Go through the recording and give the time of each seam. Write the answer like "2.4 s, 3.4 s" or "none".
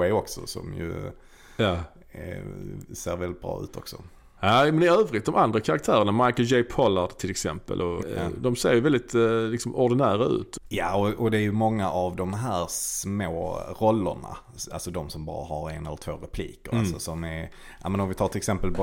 8.0 s